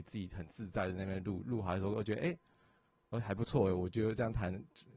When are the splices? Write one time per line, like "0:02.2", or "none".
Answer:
none